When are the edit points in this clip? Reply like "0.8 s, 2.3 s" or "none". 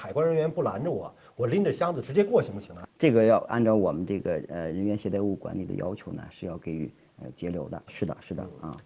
2.8 s, 7.9 s